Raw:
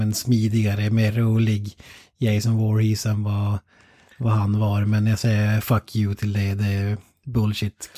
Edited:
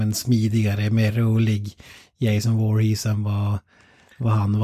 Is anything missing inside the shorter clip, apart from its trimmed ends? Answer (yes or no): no